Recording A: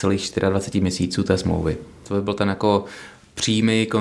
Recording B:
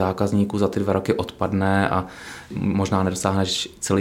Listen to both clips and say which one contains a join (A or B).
A